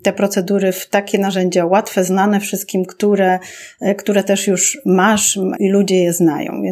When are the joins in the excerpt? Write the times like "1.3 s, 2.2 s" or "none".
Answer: 5.6 s